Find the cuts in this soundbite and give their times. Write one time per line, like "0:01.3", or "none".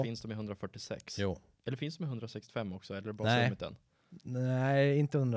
none